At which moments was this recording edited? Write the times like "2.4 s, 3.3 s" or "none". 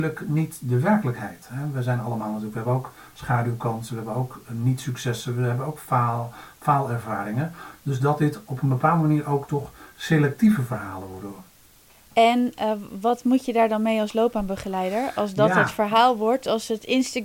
none